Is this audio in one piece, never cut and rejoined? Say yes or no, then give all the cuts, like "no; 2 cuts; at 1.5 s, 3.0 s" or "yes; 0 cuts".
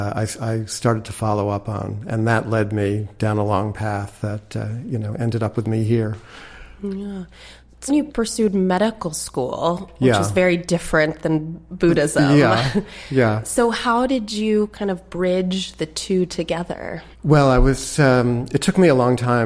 no; 2 cuts; at 7.9 s, 17.1 s